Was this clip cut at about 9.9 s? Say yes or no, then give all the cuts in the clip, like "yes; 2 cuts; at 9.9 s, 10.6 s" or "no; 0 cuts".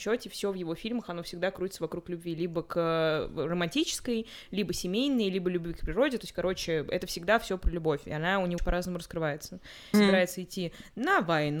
yes; 2 cuts; at 8.6 s, 9.9 s